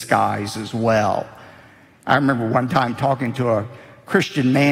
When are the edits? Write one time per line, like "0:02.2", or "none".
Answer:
none